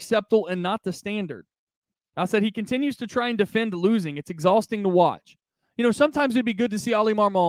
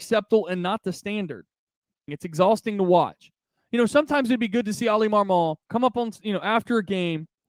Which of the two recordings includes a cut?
second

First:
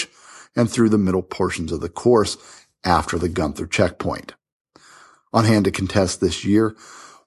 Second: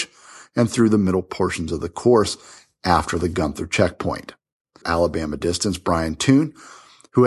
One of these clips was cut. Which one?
second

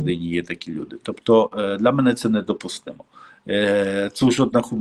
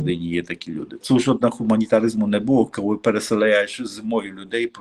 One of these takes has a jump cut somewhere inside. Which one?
second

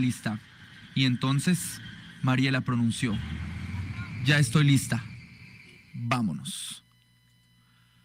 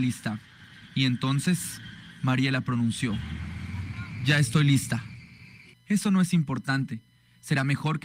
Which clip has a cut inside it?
second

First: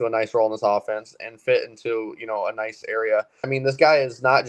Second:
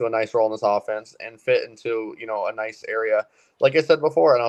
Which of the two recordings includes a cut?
first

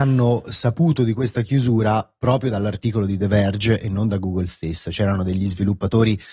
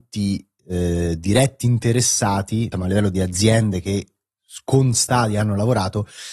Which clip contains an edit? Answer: second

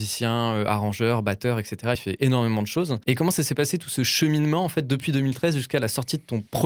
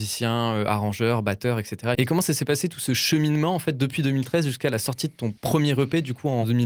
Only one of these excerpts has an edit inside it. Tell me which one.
second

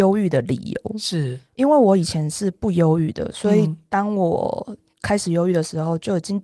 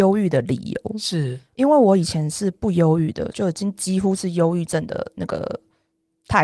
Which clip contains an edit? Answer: second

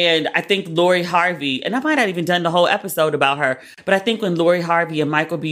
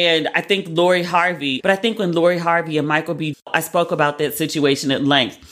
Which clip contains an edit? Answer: second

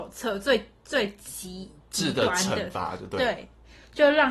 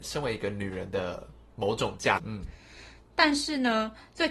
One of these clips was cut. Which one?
second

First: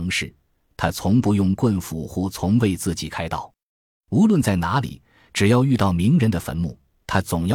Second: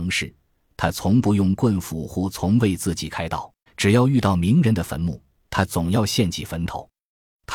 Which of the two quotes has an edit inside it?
second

